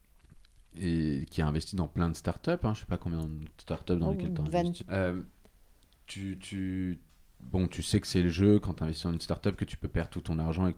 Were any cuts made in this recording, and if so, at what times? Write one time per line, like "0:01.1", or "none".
0:04.8